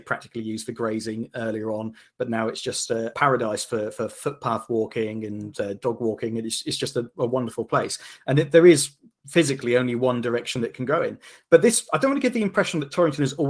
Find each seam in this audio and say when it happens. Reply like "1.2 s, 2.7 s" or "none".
3.1 s